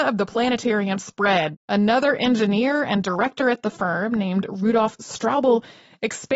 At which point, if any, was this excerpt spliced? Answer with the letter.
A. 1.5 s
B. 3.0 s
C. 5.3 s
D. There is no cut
A